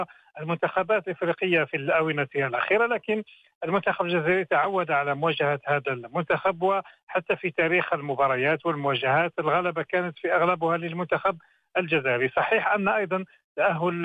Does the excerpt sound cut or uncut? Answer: uncut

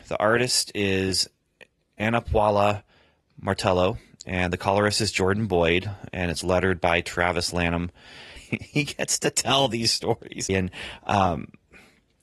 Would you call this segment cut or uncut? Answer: cut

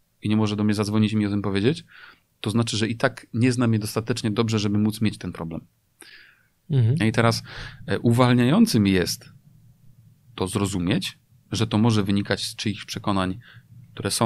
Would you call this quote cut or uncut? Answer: cut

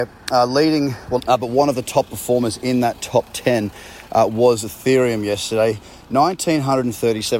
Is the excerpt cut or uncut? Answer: cut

